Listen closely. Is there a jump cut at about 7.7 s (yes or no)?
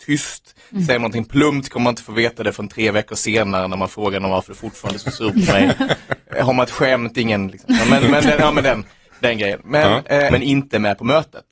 yes